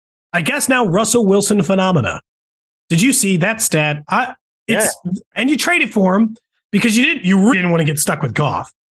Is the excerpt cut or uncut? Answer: cut